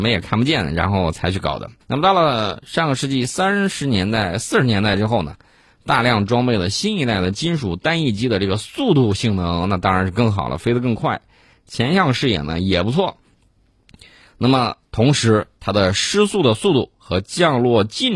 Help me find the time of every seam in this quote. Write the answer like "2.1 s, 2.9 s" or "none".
1.8 s

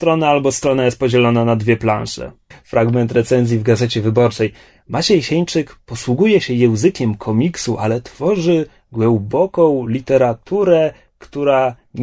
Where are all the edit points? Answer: 2.5 s

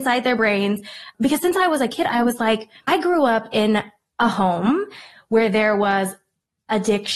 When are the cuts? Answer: none

